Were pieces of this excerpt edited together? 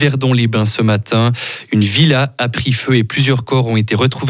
no; 0 cuts

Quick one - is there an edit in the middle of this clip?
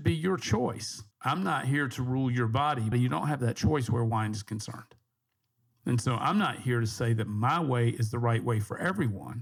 yes; 2 cuts; at 1.1 s, 2.9 s

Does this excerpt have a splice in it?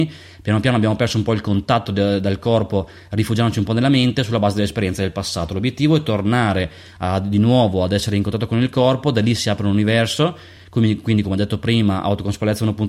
no; 0 cuts

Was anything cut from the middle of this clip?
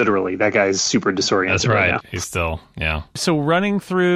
no; 0 cuts

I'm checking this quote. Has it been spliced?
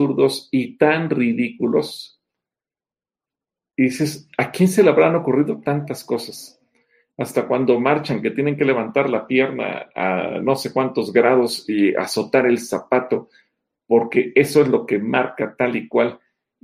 no; 0 cuts

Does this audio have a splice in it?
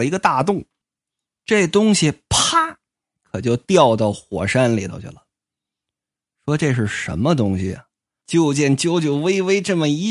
yes; 1 cut; at 8.2 s

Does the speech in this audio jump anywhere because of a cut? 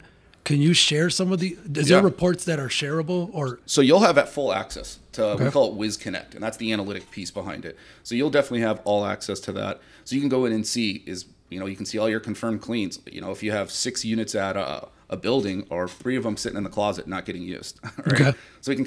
no; 0 cuts

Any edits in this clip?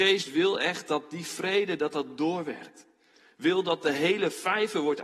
no; 0 cuts

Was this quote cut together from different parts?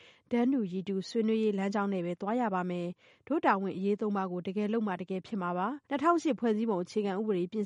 yes; 1 cut; at 5.8 s

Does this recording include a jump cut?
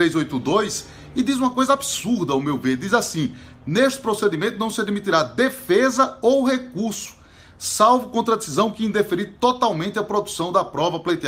no; 0 cuts

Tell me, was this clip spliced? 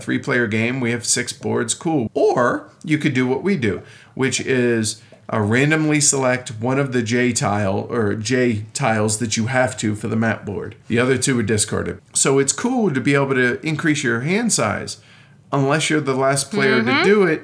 yes; 2 cuts; at 2.1 s, 12.0 s

